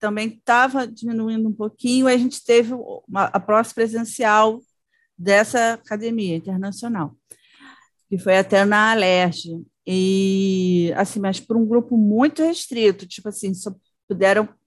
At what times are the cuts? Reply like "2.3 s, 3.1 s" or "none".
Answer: none